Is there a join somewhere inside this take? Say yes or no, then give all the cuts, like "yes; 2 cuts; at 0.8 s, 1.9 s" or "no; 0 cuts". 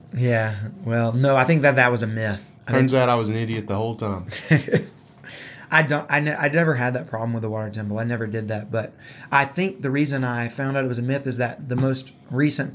no; 0 cuts